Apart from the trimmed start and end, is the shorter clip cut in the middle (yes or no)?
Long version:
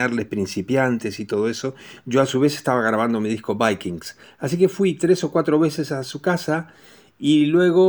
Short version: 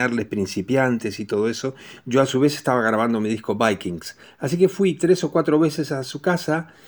no